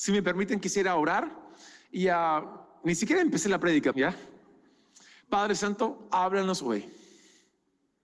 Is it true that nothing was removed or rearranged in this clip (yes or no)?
no